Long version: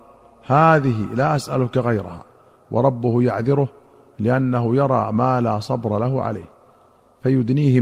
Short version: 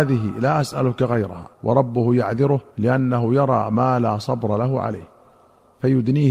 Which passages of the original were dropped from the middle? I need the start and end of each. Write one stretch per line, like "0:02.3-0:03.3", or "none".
0:02.3-0:02.6
0:03.8-0:04.1